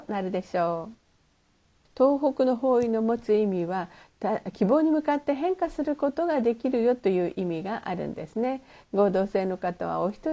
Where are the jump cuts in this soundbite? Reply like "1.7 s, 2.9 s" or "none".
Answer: 1.9 s

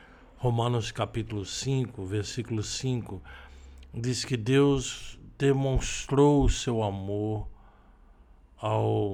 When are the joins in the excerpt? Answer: none

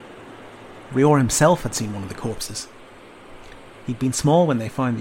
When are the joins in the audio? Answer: none

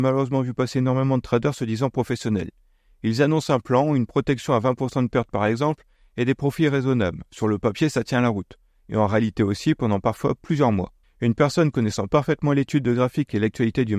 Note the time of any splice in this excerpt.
11.0 s

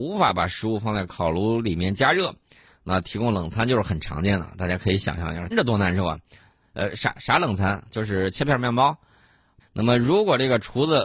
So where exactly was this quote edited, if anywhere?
5.5 s, 9.6 s

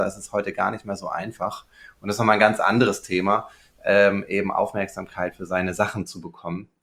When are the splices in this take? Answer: none

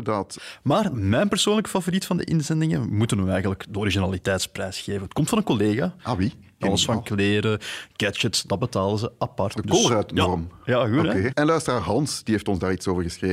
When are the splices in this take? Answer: 6.6 s, 9.5 s, 11.3 s

